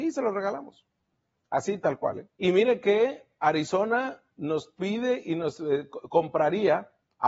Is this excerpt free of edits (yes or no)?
no